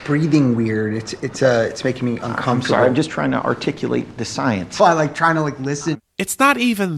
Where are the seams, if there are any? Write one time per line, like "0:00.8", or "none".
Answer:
0:04.8
0:05.9